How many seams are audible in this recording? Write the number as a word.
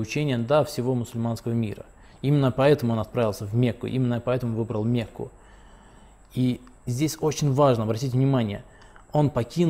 zero